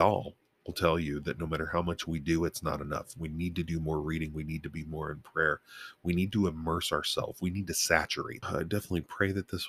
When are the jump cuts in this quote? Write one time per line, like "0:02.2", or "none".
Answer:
0:08.4